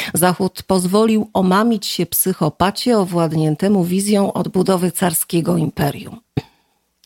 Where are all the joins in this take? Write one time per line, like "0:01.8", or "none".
none